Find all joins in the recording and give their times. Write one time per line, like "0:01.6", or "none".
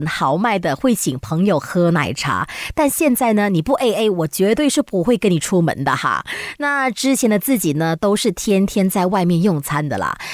none